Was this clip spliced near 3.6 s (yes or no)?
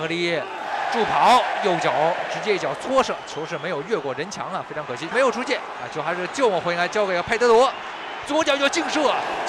no